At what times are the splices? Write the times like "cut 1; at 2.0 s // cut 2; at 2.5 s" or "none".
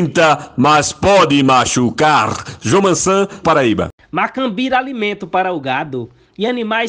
cut 1; at 3.4 s